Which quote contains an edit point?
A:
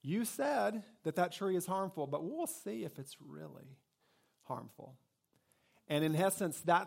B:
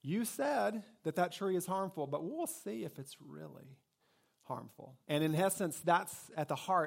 B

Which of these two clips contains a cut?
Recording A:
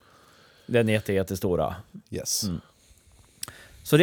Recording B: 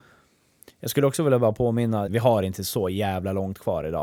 B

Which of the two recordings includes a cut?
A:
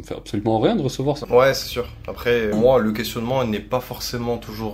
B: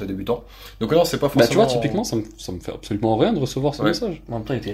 A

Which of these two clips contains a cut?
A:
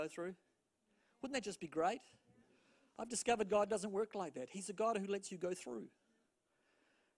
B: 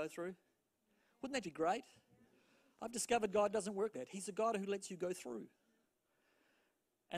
B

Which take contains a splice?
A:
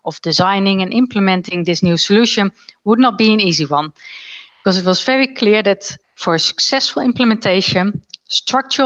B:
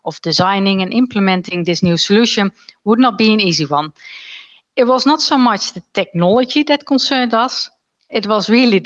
A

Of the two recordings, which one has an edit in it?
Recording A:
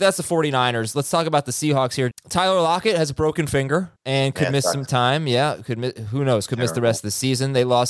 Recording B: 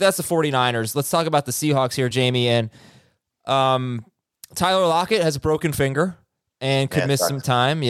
A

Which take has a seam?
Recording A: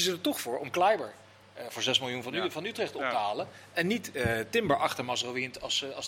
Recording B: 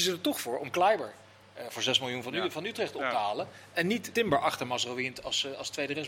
B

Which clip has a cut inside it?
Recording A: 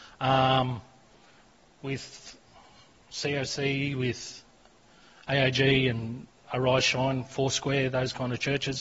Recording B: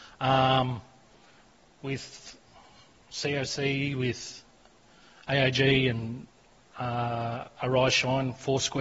A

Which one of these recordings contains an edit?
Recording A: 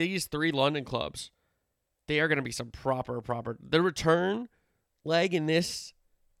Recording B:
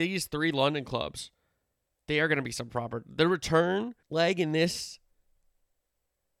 B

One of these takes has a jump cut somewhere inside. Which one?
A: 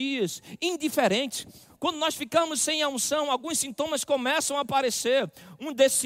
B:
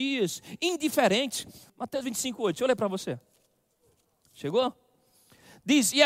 B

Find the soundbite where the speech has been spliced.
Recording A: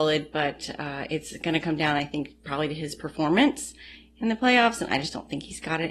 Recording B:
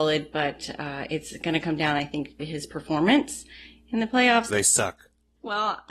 B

